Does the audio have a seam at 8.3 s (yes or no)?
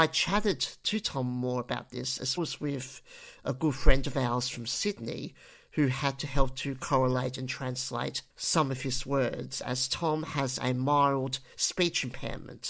yes